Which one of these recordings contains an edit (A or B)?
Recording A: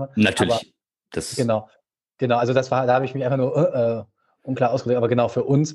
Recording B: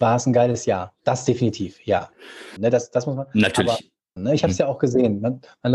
B